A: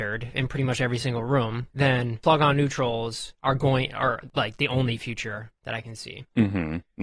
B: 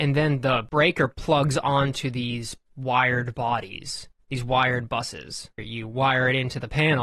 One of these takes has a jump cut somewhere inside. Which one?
B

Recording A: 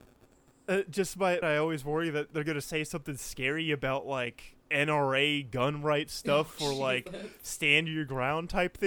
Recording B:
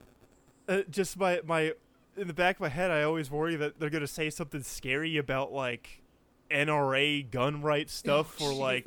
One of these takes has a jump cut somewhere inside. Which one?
A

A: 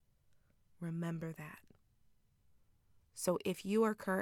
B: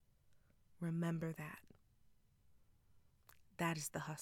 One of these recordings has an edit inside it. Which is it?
A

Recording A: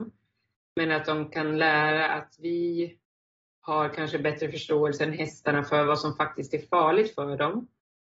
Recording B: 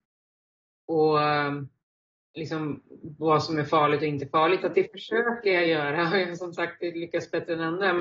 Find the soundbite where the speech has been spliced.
B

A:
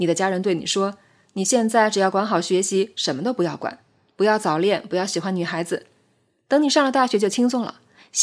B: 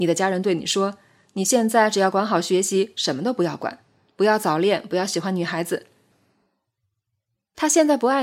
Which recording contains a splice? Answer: B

